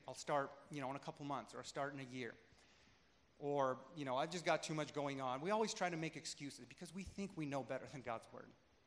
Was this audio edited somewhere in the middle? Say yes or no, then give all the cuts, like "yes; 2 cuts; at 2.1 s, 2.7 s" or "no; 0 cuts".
no; 0 cuts